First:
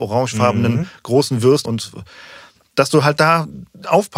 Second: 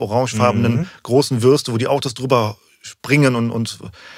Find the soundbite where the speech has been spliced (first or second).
first